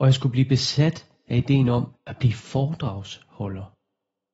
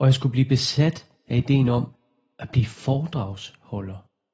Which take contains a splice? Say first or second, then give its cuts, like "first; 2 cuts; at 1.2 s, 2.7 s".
first; 1 cut; at 2.0 s